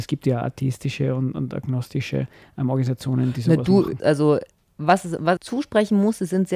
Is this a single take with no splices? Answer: no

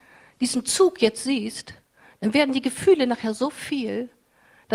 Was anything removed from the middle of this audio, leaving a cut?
no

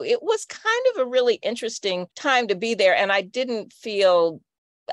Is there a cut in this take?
yes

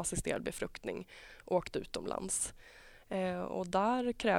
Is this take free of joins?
yes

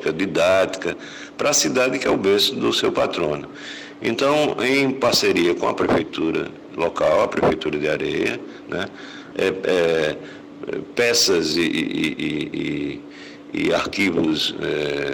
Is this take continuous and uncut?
no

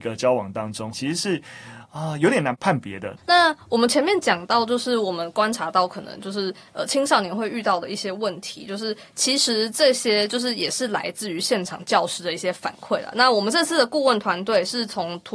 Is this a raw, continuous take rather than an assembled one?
no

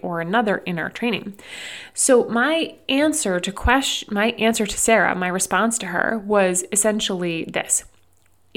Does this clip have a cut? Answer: no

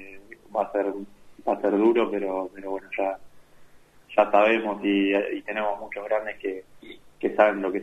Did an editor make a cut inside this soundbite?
no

